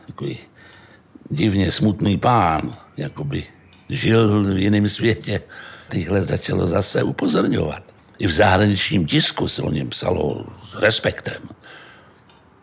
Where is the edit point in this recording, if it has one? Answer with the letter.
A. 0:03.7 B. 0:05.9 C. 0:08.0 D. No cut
B